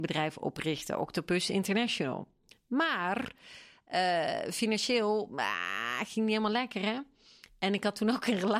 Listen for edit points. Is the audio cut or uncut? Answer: uncut